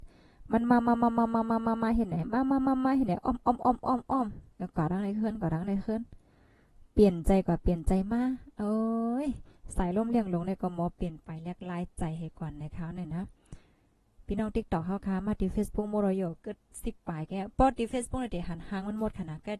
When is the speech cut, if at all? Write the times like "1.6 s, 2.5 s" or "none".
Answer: none